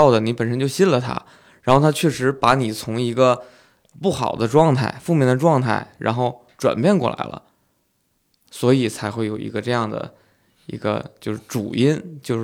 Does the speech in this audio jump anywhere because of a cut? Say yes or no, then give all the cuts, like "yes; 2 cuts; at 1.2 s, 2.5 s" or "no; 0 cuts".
no; 0 cuts